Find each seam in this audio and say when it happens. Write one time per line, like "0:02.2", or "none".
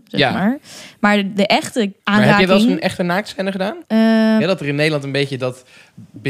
0:04.4